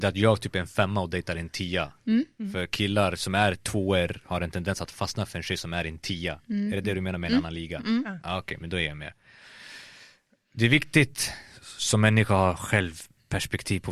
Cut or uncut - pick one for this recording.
uncut